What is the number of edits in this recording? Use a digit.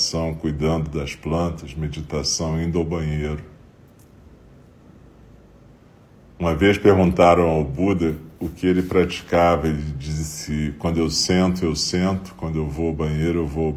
0